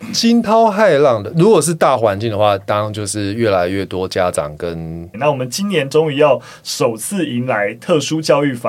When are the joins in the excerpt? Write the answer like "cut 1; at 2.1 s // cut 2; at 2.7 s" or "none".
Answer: cut 1; at 5.1 s